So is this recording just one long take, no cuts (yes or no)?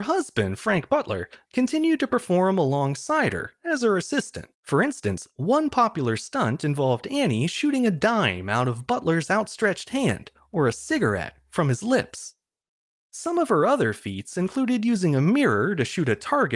no